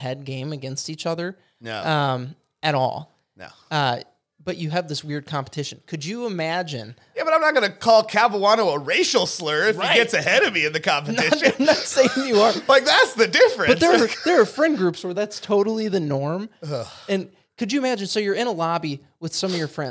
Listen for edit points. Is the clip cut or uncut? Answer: uncut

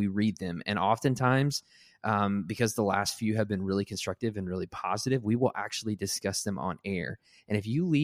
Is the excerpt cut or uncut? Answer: uncut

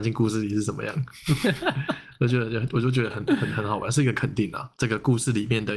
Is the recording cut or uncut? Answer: cut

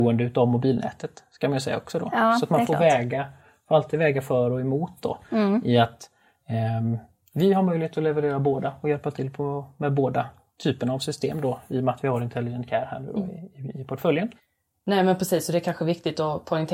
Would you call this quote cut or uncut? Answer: uncut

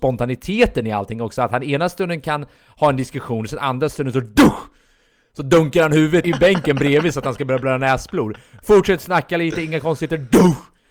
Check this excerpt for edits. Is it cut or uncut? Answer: cut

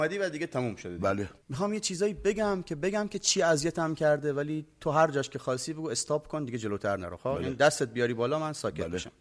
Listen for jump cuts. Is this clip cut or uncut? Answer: cut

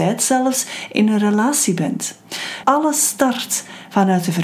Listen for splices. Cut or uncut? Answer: cut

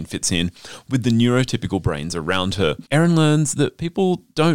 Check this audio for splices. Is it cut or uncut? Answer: cut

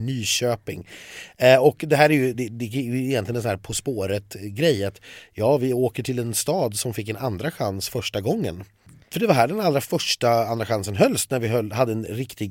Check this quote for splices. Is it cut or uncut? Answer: uncut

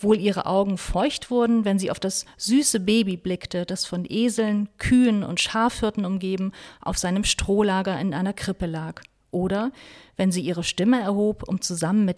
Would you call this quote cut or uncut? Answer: uncut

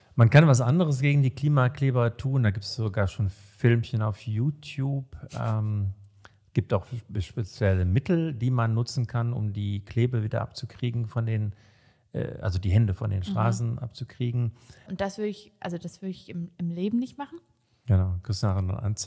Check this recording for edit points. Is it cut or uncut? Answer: cut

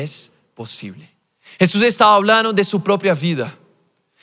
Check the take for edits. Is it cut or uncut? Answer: uncut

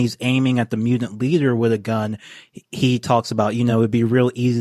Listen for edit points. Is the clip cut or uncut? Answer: uncut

